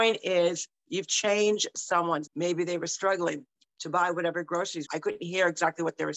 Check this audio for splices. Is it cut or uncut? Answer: cut